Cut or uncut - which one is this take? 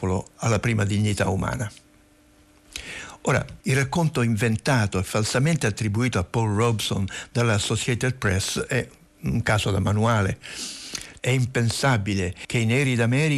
cut